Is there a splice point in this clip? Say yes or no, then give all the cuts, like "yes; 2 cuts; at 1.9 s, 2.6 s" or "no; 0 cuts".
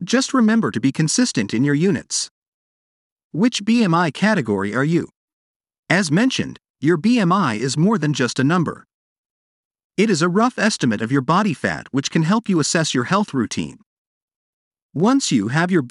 no; 0 cuts